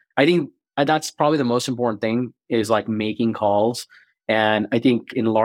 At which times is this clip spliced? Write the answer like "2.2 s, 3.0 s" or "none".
none

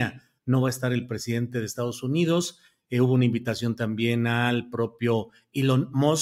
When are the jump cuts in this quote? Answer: none

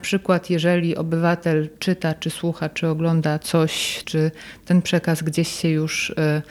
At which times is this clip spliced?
4.0 s

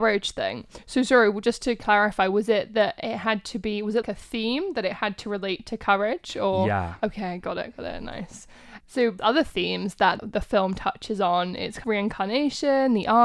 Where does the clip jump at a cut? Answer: 4.0 s

